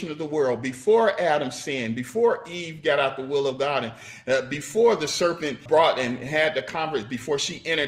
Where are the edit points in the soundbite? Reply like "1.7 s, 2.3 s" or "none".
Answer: 5.7 s